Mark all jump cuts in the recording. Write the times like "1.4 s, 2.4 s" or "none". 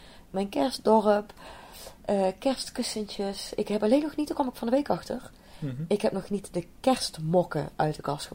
none